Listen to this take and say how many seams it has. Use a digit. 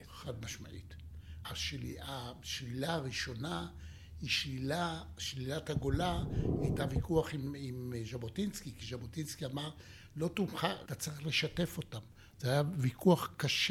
2